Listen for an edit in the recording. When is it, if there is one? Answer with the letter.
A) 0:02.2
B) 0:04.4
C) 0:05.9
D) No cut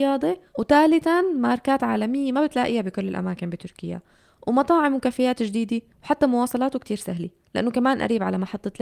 C